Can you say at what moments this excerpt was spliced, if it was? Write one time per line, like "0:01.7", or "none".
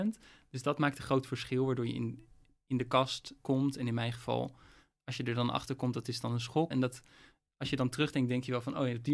0:03.4
0:06.7